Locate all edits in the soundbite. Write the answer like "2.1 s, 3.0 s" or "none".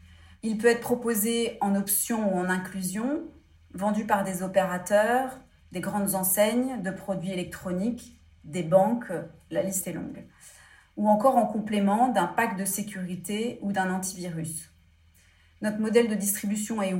5.6 s